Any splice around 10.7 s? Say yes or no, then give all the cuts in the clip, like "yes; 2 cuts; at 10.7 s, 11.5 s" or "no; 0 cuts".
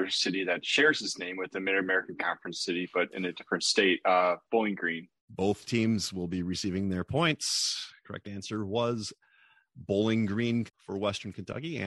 yes; 2 cuts; at 5.2 s, 10.7 s